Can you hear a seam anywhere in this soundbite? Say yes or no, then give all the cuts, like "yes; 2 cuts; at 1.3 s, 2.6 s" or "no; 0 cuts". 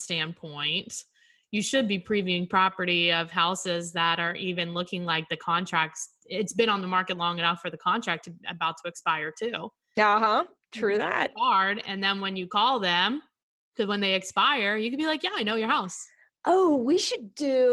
no; 0 cuts